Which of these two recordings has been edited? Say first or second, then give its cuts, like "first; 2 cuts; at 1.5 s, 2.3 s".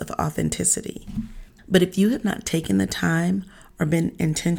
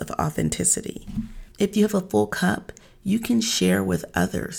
first; 1 cut; at 1.5 s